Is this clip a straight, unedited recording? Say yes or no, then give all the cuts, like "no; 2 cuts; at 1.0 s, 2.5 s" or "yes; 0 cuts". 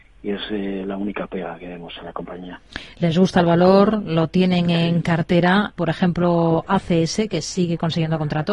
no; 1 cut; at 5.8 s